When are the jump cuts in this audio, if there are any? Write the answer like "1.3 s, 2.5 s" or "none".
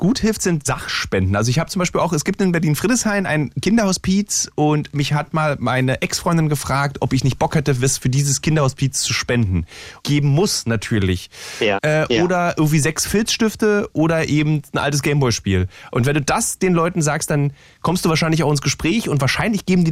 10.0 s, 11.8 s